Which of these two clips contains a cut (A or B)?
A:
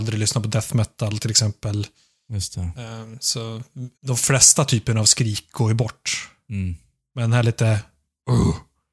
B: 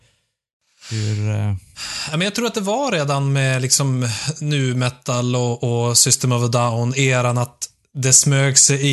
A